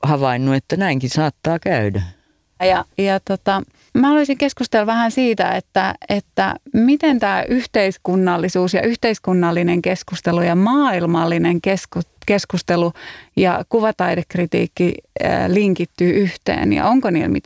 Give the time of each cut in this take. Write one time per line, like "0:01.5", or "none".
0:02.6